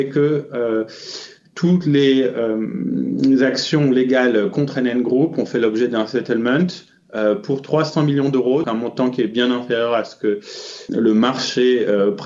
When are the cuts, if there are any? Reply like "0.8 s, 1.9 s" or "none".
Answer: 8.6 s, 10.9 s